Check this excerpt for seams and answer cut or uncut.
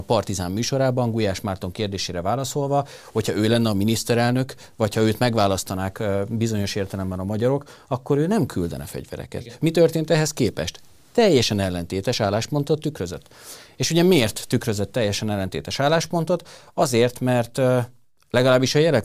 cut